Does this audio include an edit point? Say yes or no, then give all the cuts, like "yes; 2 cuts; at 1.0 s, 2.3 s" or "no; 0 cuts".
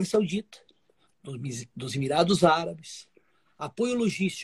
no; 0 cuts